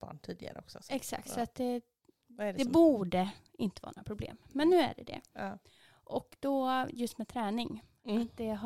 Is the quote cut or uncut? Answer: uncut